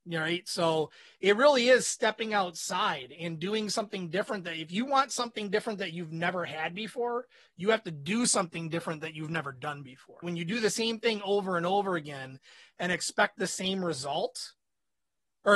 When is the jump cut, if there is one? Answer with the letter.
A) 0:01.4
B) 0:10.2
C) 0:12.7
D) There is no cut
B